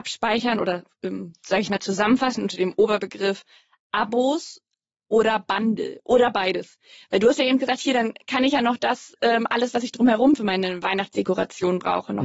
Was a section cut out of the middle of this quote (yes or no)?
no